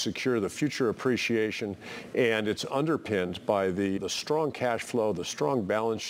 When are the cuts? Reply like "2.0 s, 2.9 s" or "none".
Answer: 4.0 s

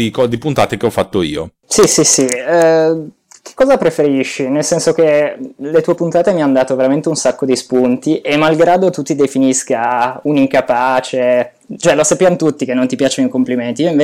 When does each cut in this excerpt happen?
none

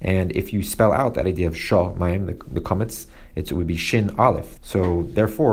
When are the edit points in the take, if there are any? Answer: 4.6 s

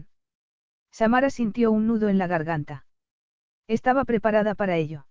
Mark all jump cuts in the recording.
none

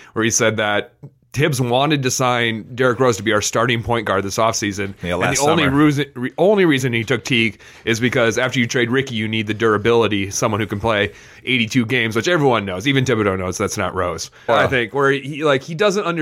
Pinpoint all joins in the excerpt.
14.5 s

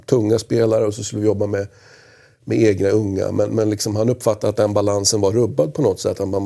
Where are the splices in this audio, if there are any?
none

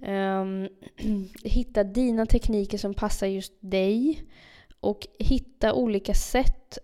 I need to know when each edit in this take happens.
1.4 s

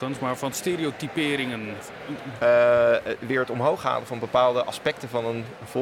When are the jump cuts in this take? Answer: 2.4 s

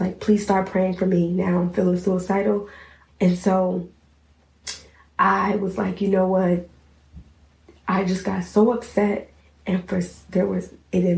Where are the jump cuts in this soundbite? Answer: 3.1 s

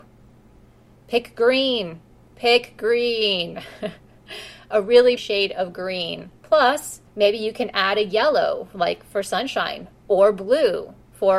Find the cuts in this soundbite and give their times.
5.2 s, 7.1 s

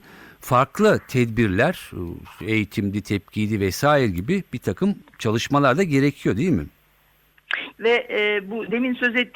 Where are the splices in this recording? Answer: 7.7 s

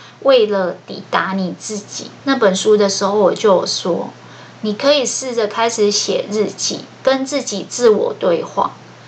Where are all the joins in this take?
2.2 s, 6.9 s

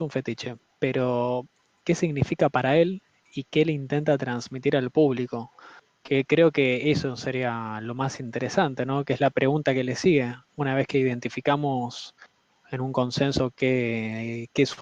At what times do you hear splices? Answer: none

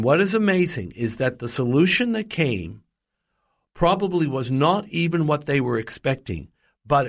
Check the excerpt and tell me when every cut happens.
none

